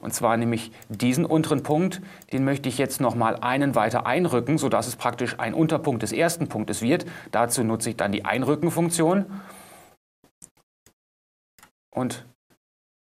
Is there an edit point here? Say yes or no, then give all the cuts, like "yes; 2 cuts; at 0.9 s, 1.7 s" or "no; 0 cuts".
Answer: no; 0 cuts